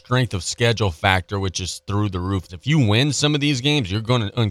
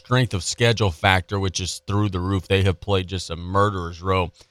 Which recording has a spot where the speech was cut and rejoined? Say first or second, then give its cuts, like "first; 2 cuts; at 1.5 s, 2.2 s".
first; 1 cut; at 2.5 s